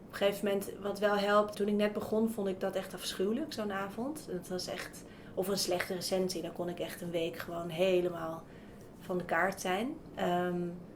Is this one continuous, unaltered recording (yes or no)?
no